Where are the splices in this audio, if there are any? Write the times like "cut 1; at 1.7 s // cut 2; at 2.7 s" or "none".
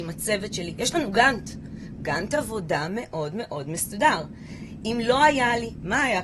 none